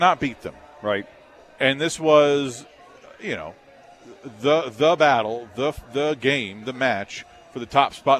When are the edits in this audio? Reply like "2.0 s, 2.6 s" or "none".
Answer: none